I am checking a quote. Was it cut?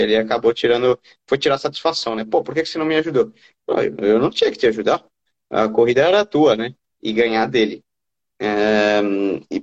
yes; 1 cut; at 6.9 s

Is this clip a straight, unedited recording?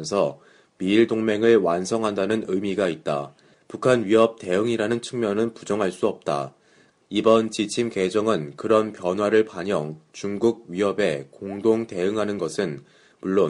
no; 2 cuts; at 3.5 s, 7.0 s

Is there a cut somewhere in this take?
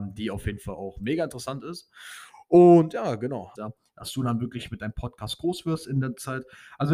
yes; 1 cut; at 3.6 s

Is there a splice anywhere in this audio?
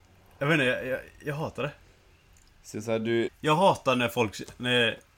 yes; 1 cut; at 3.3 s

